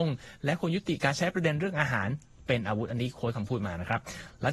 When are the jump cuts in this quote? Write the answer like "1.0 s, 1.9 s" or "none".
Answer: none